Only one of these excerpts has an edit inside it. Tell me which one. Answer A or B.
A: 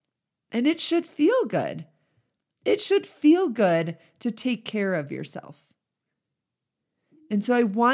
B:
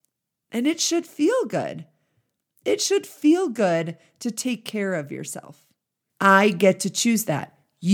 B